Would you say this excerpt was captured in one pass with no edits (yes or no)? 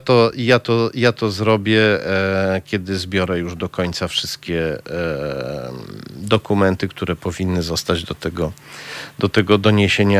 yes